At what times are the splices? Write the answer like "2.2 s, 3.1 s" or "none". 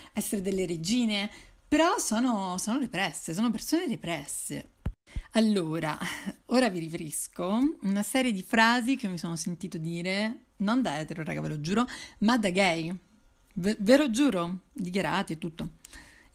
none

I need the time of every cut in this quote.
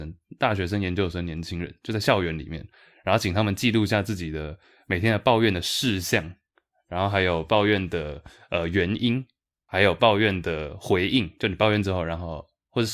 none

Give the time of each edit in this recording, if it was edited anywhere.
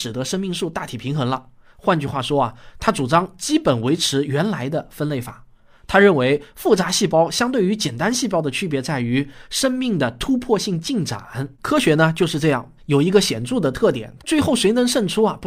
11.5 s, 12.8 s, 14.2 s

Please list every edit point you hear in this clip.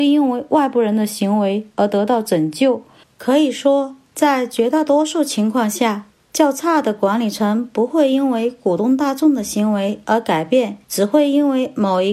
3.0 s, 10.8 s

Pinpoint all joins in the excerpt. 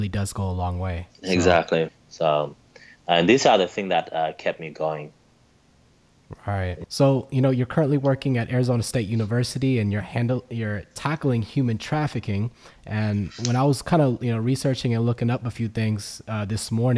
1.9 s, 6.8 s

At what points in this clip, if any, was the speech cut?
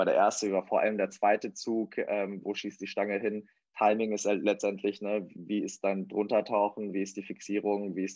none

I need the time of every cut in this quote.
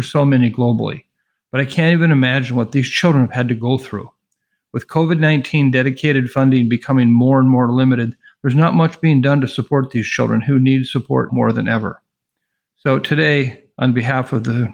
11.3 s

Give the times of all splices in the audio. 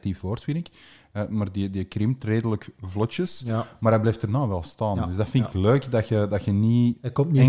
none

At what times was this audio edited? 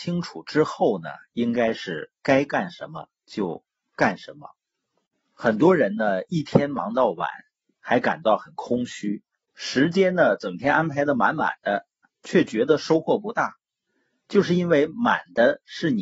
none

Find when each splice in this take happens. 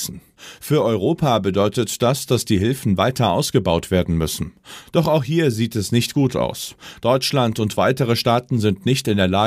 none

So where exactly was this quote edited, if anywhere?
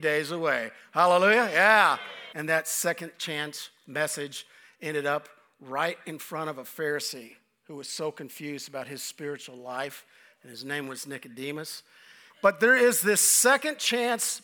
2.3 s, 12.3 s

